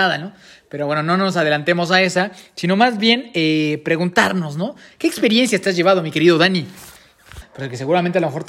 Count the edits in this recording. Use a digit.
2